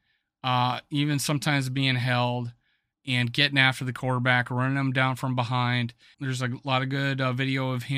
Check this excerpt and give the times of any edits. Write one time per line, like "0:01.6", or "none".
0:02.9
0:06.1